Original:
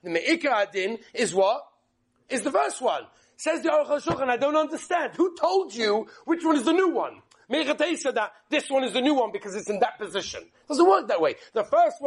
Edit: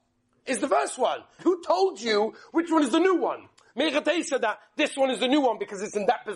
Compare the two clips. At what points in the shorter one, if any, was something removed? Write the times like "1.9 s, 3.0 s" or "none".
1.4 s